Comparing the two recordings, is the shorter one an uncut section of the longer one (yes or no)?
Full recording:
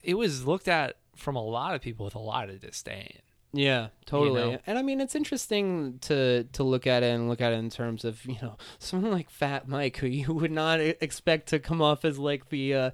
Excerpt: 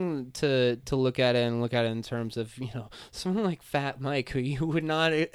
yes